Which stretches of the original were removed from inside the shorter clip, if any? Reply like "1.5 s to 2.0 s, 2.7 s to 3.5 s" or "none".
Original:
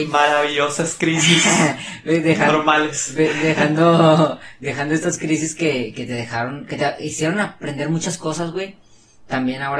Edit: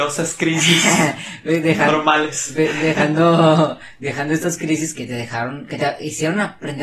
5.5 s to 5.9 s